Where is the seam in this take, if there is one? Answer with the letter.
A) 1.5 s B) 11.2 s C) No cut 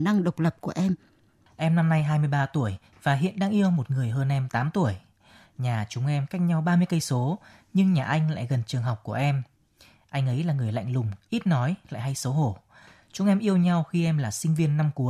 A